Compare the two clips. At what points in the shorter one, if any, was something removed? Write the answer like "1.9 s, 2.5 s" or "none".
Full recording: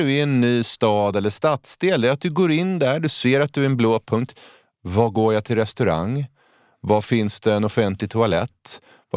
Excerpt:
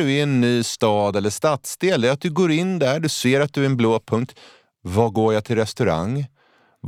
none